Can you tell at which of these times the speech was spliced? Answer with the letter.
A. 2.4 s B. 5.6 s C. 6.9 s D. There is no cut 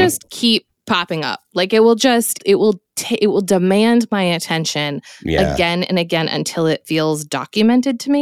A